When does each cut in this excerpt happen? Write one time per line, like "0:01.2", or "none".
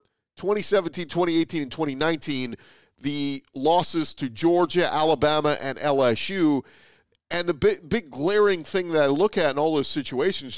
none